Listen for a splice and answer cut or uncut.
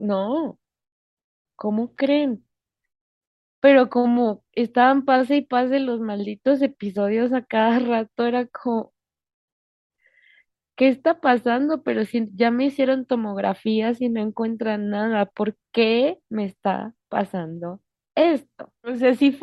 uncut